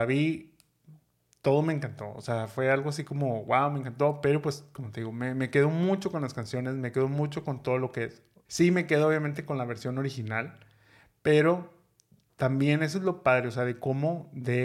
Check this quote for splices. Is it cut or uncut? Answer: cut